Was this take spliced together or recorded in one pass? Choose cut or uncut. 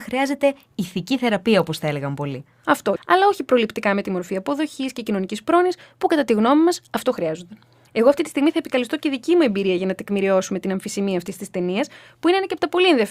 cut